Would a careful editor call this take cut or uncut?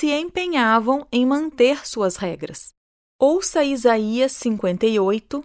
cut